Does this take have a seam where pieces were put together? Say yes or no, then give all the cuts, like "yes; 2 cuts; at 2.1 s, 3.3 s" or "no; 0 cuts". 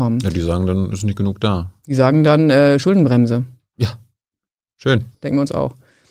yes; 1 cut; at 5.1 s